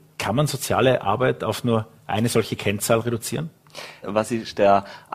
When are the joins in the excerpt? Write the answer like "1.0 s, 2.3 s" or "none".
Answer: 4.0 s